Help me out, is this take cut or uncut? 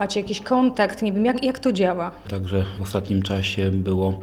cut